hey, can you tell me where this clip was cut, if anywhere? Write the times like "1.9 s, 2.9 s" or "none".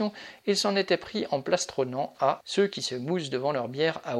2.4 s